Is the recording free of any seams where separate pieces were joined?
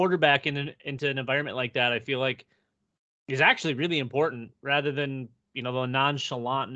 yes; 0 cuts

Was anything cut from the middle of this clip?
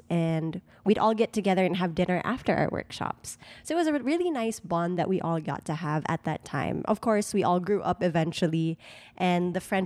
no; 0 cuts

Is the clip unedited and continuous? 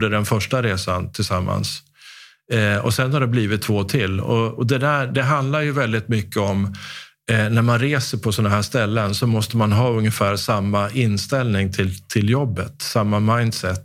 yes; 0 cuts

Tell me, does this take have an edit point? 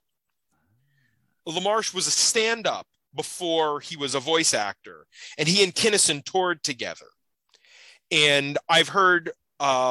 no; 0 cuts

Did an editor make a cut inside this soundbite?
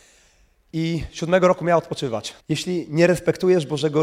yes; 1 cut; at 2.4 s

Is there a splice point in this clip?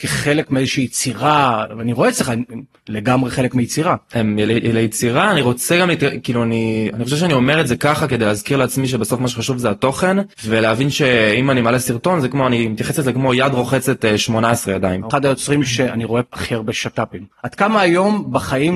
yes; 3 cuts; at 10.3 s, 15.1 s, 17.3 s

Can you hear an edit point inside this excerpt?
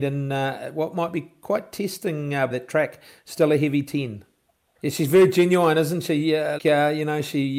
yes; 3 cuts; at 2.5 s, 4.7 s, 6.6 s

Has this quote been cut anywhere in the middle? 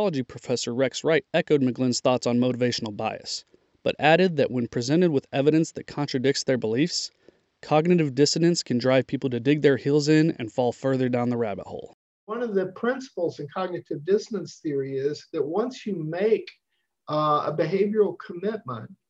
no; 0 cuts

